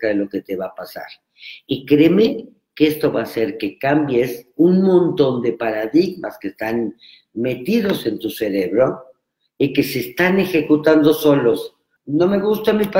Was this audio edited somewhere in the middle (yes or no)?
yes